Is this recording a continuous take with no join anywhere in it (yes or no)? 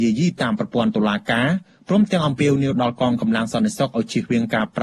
yes